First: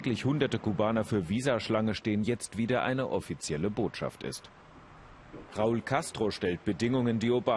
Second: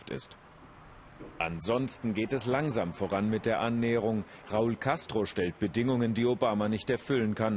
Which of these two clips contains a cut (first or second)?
first